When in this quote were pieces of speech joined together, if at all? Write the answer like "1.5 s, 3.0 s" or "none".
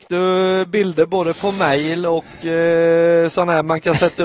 none